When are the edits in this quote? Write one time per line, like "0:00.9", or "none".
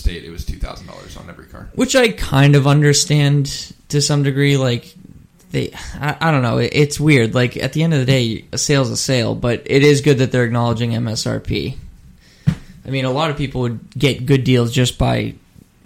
none